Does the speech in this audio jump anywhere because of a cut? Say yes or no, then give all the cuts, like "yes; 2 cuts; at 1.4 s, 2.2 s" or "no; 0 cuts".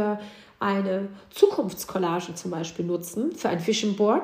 no; 0 cuts